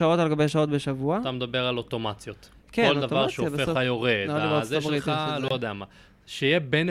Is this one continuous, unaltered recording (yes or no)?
no